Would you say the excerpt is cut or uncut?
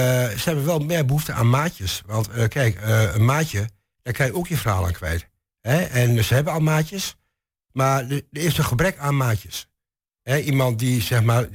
uncut